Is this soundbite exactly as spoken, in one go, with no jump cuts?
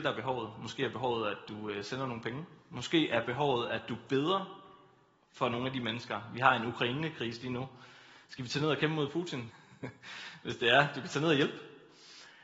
no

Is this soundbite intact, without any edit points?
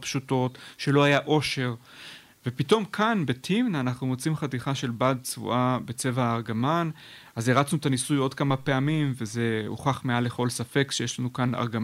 yes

